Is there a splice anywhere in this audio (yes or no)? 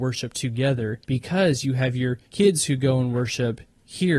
yes